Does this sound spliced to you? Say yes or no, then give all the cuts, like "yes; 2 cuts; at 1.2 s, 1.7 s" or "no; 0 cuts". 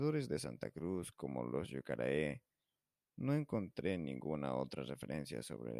no; 0 cuts